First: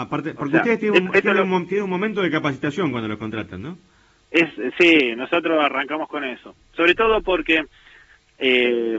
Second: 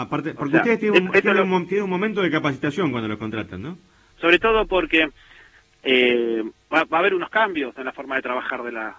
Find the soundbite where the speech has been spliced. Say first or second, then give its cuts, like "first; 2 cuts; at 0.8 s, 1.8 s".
second; 1 cut; at 4.1 s